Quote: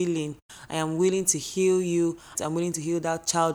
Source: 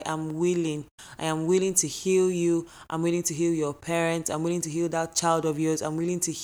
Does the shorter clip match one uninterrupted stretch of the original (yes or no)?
no